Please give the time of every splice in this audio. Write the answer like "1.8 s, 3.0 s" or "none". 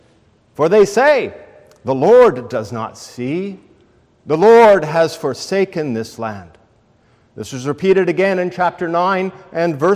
none